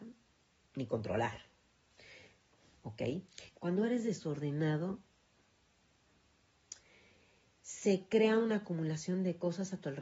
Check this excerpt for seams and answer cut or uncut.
cut